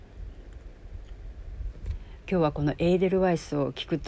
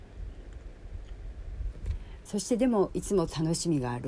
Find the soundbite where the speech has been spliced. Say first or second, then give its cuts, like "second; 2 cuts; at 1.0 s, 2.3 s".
second; 1 cut; at 2.3 s